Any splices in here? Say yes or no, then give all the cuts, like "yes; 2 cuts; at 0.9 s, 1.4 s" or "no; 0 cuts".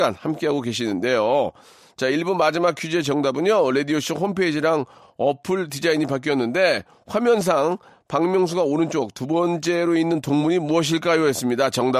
no; 0 cuts